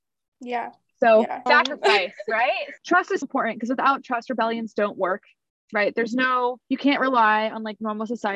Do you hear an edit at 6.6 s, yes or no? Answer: yes